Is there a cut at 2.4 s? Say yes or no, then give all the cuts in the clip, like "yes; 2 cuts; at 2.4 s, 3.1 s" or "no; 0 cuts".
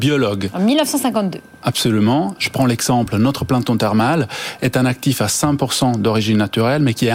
yes; 1 cut; at 2.4 s